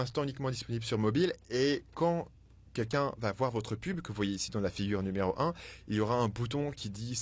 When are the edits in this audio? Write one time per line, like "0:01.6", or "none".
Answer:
none